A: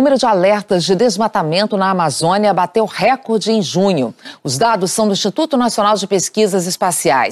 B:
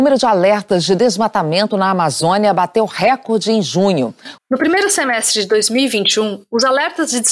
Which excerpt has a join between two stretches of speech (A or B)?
B